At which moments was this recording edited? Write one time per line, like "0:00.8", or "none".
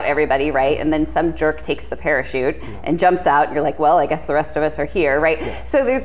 none